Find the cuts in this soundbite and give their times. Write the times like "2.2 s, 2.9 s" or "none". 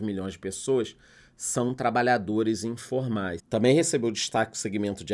3.4 s